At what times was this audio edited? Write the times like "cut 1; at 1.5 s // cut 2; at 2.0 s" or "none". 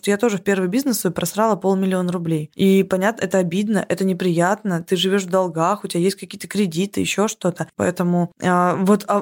cut 1; at 7.7 s